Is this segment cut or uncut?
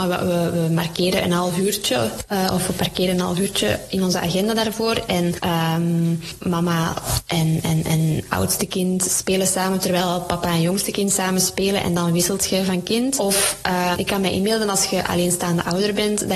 cut